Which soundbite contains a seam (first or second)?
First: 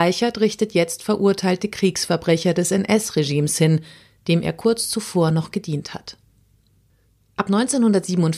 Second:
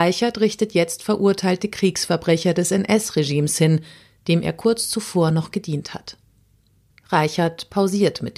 second